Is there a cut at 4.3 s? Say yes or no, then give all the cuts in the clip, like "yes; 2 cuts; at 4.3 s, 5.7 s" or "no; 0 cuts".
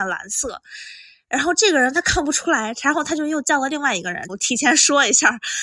yes; 1 cut; at 4.3 s